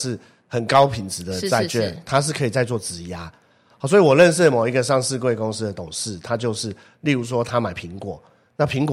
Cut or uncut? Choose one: uncut